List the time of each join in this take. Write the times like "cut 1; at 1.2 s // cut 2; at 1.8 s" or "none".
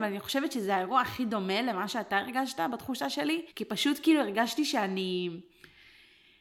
cut 1; at 3.5 s